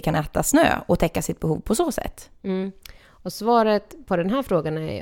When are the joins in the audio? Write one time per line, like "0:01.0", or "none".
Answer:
none